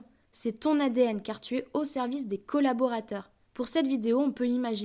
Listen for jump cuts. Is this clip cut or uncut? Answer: cut